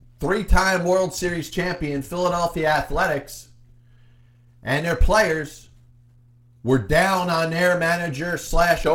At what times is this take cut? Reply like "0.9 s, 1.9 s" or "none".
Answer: none